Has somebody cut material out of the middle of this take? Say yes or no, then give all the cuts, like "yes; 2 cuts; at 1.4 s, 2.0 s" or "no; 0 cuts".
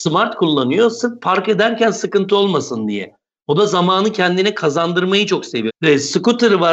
yes; 1 cut; at 5.7 s